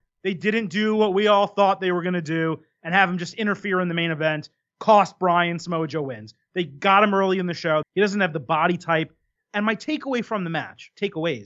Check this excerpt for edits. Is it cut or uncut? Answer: cut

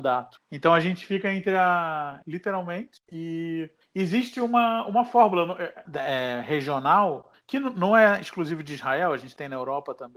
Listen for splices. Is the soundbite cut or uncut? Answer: cut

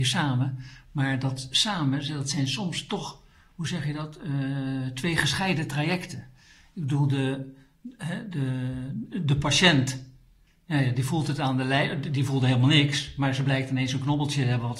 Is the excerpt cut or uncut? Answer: uncut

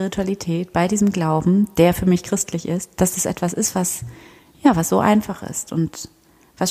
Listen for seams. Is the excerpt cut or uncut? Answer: uncut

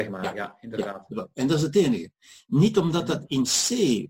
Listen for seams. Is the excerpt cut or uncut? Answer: uncut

